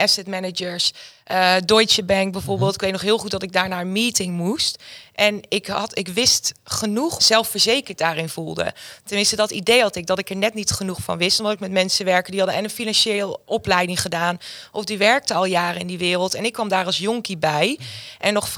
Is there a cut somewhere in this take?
yes; 2 cuts; at 7.2 s, 13.4 s

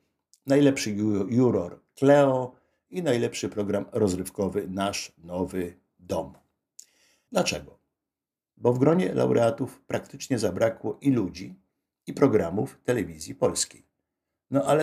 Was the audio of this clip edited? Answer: yes; 1 cut; at 7.3 s

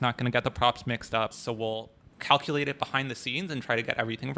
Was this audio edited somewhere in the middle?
yes; 1 cut; at 1.3 s

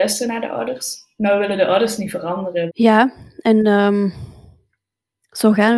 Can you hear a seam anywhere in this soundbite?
yes; 1 cut; at 2.7 s

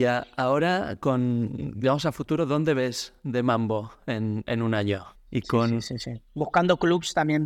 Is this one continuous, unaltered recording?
no; 1 cut; at 5.1 s

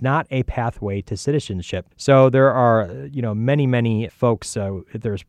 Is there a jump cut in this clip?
yes; 2 cuts; at 1.9 s, 4.1 s

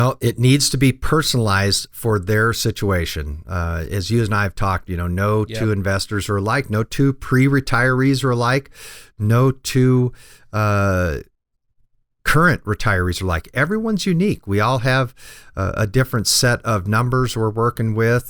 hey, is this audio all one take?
yes; 0 cuts

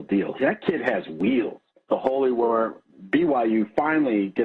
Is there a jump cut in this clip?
yes; 1 cut; at 1.9 s

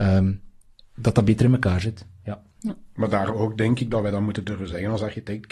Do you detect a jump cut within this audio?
no; 0 cuts

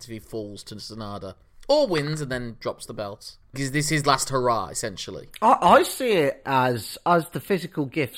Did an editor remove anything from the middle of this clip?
yes; 1 cut; at 3.5 s

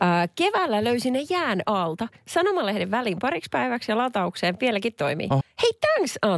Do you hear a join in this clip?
yes; 1 cut; at 5.4 s

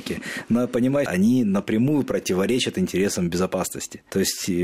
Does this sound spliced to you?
yes; 1 cut; at 1.1 s

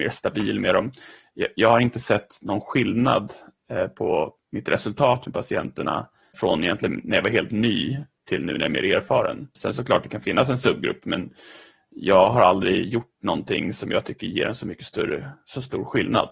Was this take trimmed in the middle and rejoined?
yes; 2 cuts; at 6.3 s, 9.6 s

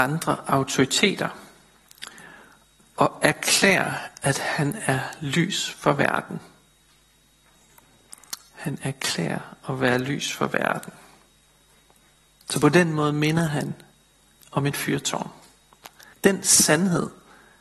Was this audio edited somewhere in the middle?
yes; 1 cut; at 16.1 s

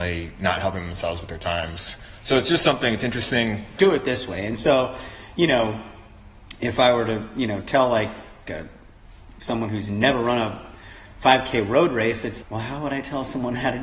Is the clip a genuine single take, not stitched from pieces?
no; 3 cuts; at 3.8 s, 8.5 s, 12.4 s

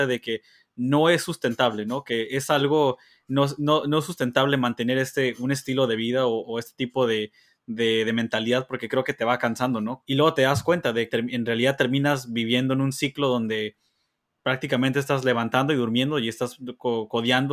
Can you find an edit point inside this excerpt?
yes; 2 cuts; at 10.0 s, 11.1 s

